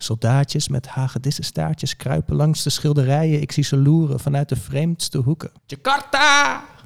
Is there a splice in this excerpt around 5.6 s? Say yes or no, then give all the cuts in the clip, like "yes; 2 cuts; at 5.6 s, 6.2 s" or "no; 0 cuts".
yes; 1 cut; at 5.6 s